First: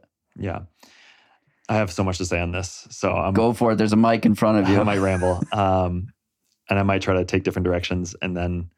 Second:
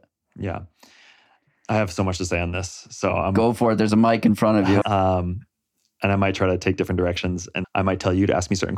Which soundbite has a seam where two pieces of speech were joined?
second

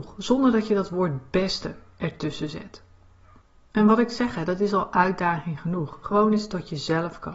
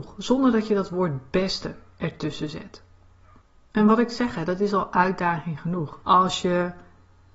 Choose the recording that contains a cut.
second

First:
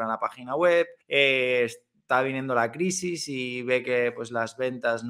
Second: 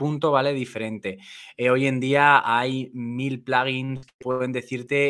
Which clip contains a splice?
first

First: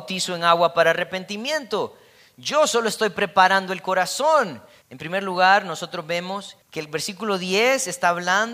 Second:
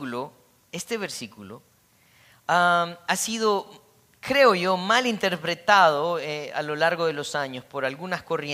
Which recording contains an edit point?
first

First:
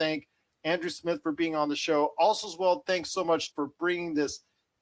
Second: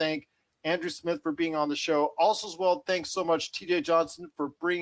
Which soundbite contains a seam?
first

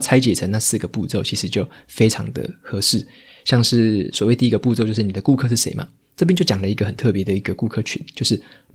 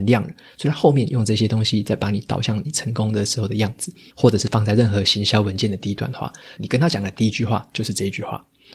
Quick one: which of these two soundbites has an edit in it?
second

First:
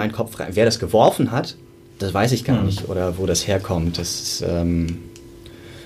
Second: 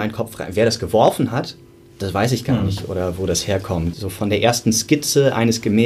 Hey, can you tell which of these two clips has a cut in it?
second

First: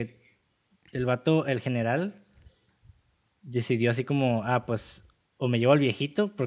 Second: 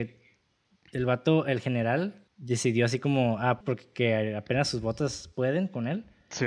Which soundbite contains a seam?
second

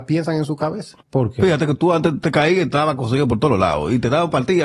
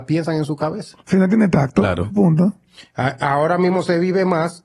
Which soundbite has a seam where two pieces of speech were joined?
first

